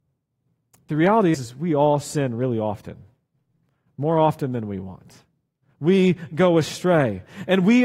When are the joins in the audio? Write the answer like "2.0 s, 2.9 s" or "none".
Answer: 1.3 s